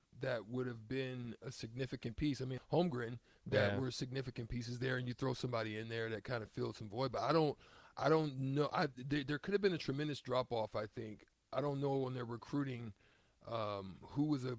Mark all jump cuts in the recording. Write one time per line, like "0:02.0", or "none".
0:02.6